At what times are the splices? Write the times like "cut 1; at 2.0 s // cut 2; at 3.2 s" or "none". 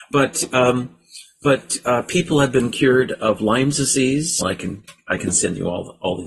cut 1; at 4.4 s